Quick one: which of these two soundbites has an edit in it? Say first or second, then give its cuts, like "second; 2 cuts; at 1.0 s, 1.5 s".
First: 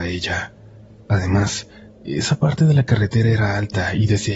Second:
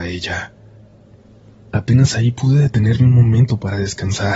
first; 1 cut; at 0.9 s